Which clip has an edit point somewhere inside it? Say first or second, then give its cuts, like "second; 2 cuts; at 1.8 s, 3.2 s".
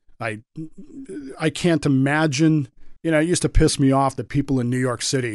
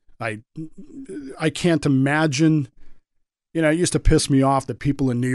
first; 1 cut; at 3.0 s